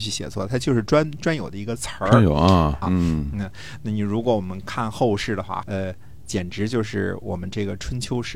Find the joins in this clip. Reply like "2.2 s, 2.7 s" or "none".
2.8 s, 5.6 s

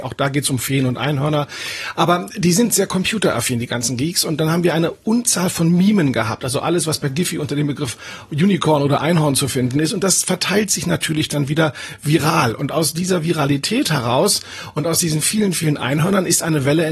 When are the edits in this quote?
none

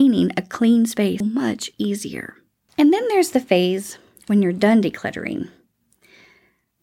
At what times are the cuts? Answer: 1.2 s

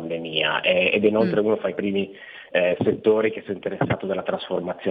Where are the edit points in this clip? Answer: none

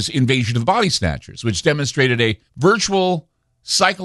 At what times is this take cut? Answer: 2.5 s

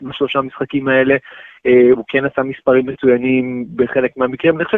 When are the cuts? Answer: 1.9 s

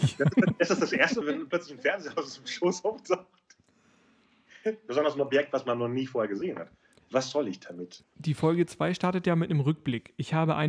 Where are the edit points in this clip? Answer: 1.2 s, 8.0 s

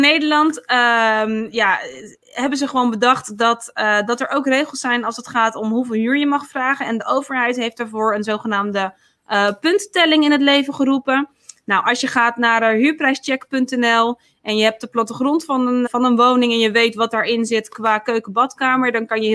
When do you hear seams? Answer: 15.9 s

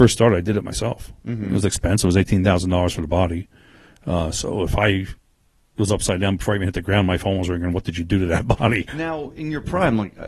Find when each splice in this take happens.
1.2 s, 8.9 s

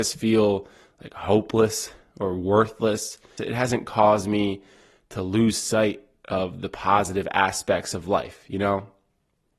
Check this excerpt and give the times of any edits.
3.4 s

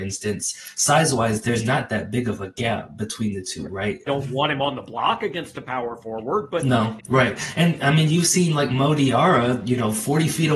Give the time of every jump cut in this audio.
4.1 s, 7.0 s

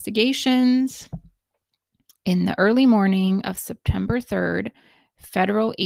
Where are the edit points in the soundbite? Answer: none

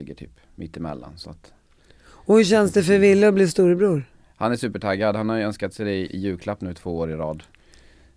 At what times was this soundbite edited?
6.1 s

